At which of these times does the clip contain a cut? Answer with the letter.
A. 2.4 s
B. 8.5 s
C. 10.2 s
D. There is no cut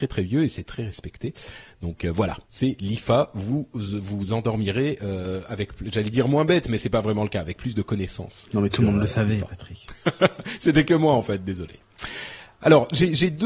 A